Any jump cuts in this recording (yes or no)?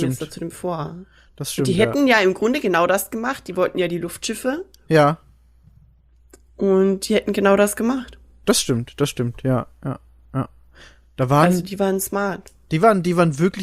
no